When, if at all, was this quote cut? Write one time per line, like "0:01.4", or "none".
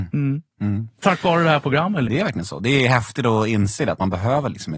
0:02.1